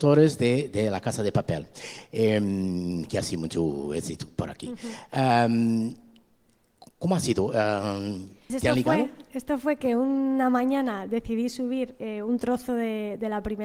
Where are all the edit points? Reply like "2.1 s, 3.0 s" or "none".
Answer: 8.5 s